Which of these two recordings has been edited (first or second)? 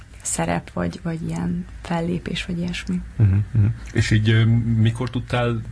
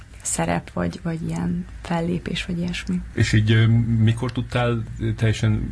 second